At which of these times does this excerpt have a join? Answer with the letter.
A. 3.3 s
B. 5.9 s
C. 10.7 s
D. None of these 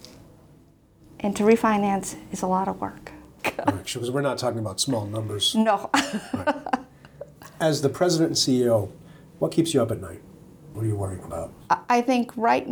C